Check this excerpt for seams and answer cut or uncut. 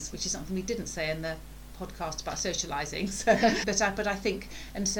cut